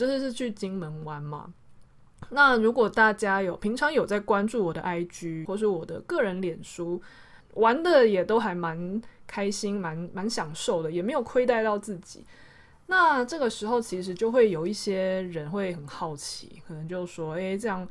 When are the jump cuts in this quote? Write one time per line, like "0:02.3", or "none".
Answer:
0:05.4
0:07.4